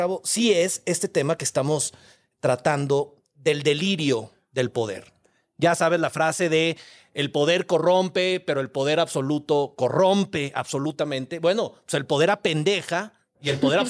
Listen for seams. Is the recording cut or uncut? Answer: uncut